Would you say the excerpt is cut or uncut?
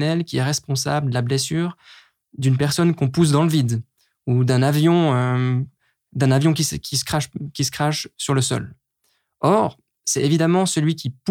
uncut